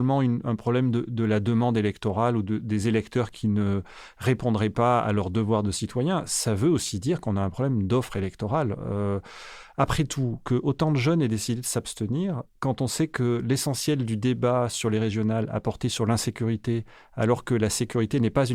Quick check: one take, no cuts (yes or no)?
yes